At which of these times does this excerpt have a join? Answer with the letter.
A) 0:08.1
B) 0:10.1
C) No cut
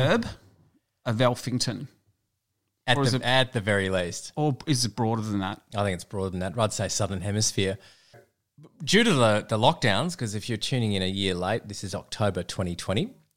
A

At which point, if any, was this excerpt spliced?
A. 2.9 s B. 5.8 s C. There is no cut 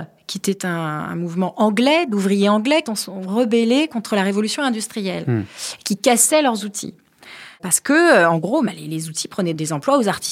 A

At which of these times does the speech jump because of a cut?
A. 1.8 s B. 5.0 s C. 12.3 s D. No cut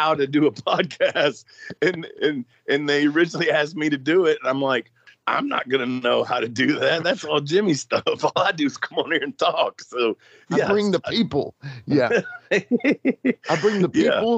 D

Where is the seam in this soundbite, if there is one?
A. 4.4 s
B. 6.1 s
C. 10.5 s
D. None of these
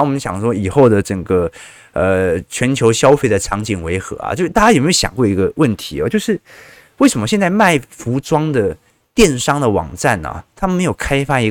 D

